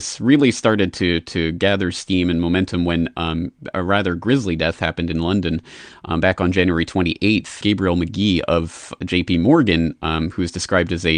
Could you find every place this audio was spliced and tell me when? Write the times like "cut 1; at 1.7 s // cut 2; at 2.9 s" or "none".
cut 1; at 7.6 s